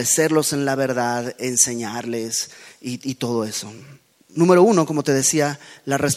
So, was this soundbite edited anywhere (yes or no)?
yes